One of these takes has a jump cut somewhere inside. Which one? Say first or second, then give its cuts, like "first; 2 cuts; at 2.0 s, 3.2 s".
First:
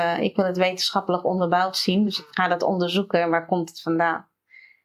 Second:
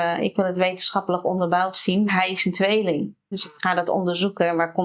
second; 2 cuts; at 2.1 s, 3.3 s